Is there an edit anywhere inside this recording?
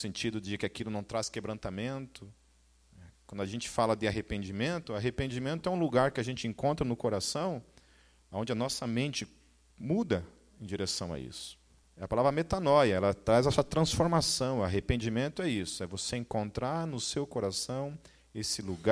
no; 0 cuts

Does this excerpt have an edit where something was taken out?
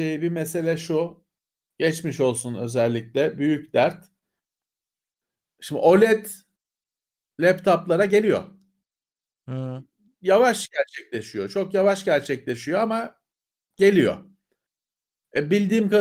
no; 0 cuts

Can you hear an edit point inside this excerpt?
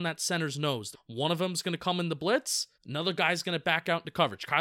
yes; 2 cuts; at 0.9 s, 2.7 s

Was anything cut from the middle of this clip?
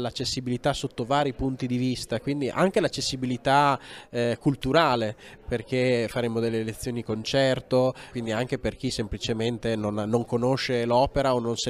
yes; 1 cut; at 8.1 s

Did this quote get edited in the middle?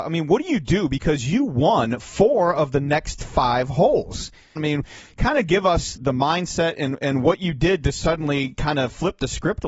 yes; 2 cuts; at 4.6 s, 6.0 s

